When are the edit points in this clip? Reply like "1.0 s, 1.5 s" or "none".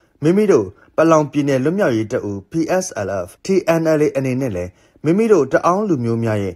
3.4 s